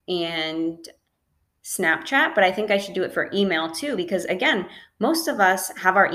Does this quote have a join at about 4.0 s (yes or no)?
no